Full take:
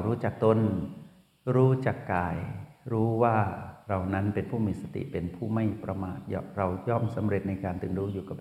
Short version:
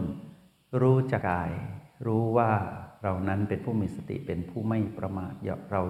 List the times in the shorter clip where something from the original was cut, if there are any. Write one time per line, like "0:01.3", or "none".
0:01.2